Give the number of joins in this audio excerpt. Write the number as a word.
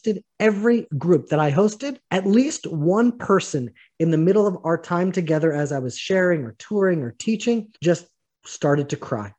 two